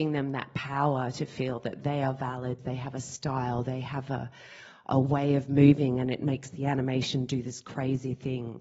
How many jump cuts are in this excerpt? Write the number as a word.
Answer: one